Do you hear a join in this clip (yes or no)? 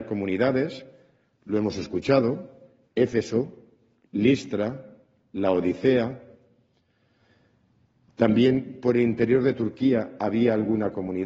no